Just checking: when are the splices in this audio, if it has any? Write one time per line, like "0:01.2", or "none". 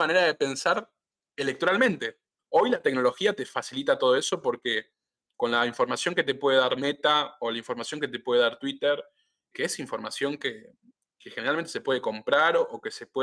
0:02.4
0:09.5